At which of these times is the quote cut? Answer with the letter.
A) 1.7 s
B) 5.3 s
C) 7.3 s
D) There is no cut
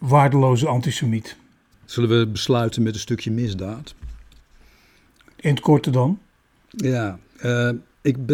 A